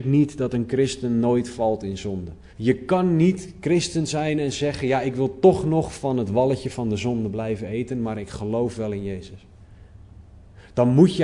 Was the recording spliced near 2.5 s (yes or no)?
yes